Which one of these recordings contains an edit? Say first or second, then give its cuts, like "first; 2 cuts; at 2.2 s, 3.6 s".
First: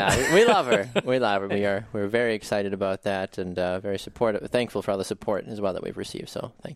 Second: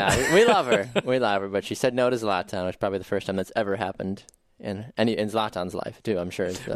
first; 1 cut; at 1.5 s